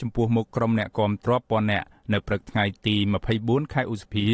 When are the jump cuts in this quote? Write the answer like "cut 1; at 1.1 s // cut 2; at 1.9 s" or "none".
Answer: cut 1; at 1.3 s